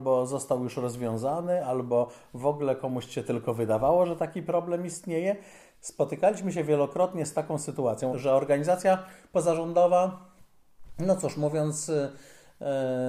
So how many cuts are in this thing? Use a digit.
2